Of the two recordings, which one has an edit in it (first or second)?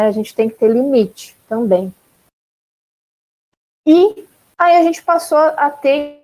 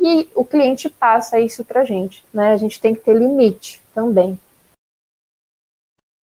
second